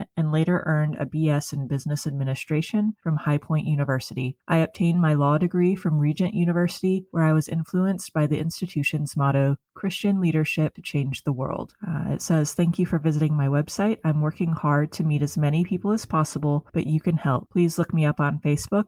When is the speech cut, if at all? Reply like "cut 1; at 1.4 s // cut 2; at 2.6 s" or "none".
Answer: none

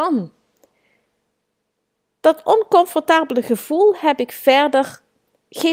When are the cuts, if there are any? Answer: none

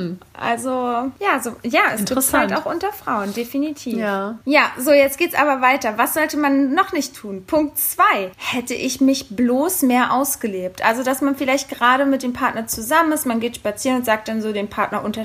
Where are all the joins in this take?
none

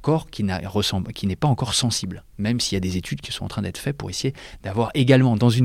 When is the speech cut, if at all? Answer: none

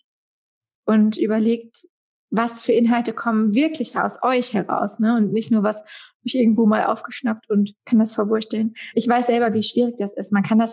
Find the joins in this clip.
cut 1; at 7.8 s

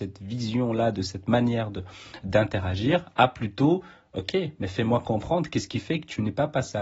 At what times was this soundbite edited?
none

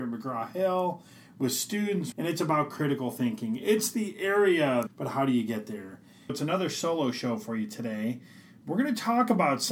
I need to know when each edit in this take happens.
cut 1; at 2.1 s // cut 2; at 4.9 s // cut 3; at 6.3 s

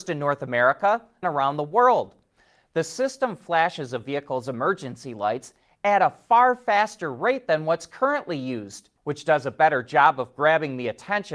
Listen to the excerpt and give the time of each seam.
cut 1; at 1.2 s // cut 2; at 9.0 s

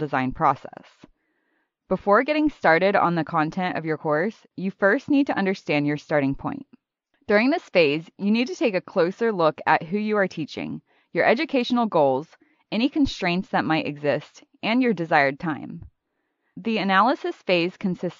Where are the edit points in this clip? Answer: none

